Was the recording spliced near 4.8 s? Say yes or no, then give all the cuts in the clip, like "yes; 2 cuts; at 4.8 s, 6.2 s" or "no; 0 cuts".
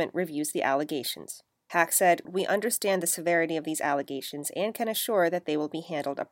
no; 1 cut; at 2.3 s